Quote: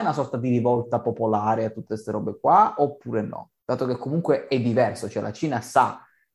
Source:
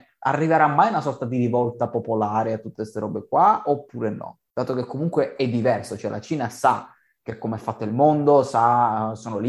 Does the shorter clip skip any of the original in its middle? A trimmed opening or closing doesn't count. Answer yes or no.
no